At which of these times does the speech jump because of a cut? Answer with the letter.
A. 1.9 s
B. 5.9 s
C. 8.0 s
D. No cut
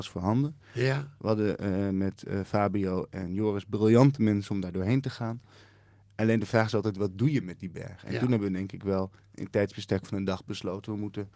D